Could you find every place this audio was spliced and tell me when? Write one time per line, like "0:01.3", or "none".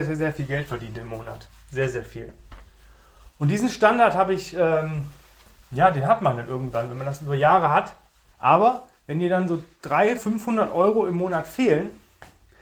0:08.3
0:10.2